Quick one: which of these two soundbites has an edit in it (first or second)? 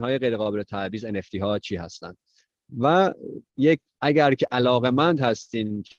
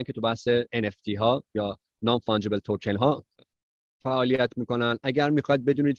first